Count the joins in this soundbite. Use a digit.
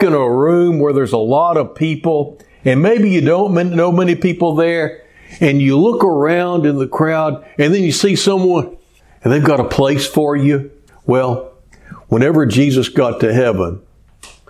1